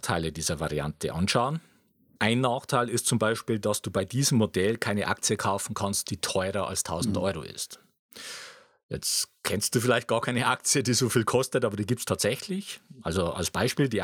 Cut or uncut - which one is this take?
uncut